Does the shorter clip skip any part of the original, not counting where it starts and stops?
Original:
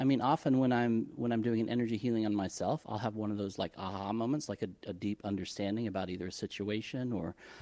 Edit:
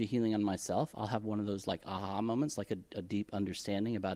no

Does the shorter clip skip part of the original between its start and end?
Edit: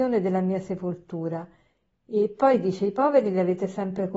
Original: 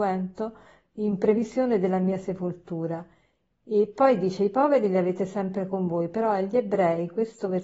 no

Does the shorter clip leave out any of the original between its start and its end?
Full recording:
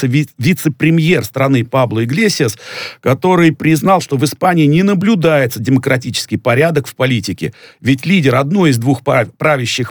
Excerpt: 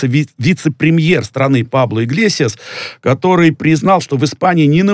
no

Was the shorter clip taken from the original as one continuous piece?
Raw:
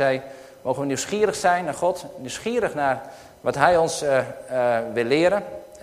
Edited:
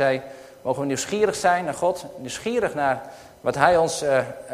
yes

